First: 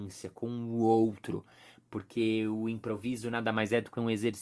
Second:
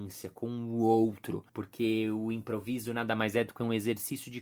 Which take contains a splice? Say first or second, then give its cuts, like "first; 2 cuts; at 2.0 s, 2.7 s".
second; 1 cut; at 1.5 s